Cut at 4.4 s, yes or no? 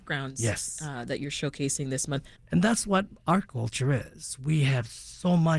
no